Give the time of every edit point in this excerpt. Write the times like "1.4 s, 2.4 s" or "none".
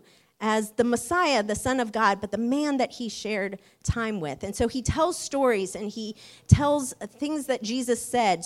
none